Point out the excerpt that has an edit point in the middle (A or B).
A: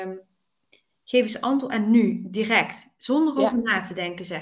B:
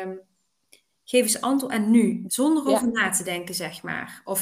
B